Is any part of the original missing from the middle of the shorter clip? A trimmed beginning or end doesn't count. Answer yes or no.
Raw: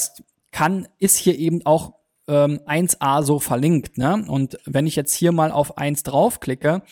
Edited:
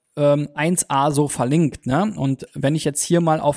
no